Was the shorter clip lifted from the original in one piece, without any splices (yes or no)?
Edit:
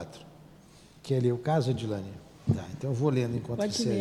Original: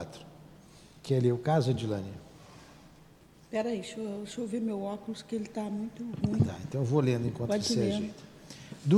no